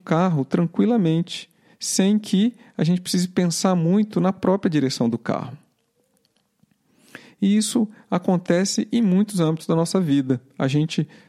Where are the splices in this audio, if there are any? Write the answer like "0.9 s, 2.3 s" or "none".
none